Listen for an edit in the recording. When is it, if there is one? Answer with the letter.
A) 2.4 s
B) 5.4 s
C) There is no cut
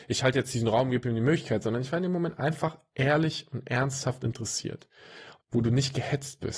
B